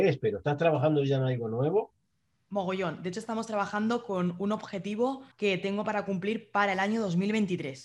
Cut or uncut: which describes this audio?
cut